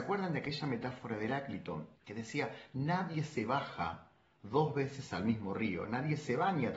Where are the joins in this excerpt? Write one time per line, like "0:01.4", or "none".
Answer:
0:02.0